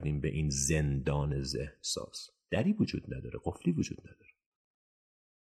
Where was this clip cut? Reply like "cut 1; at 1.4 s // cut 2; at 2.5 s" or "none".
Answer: none